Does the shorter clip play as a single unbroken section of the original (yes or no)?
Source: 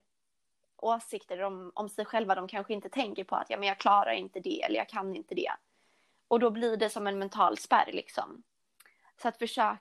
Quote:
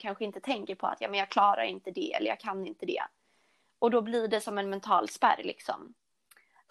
yes